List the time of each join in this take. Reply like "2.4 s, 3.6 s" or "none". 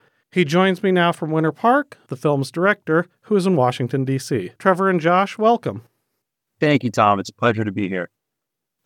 2.1 s, 4.6 s